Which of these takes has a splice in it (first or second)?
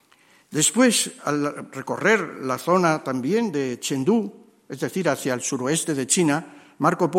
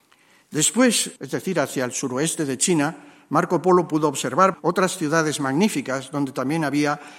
second